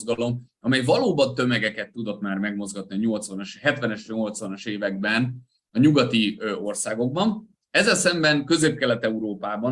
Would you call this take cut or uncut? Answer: uncut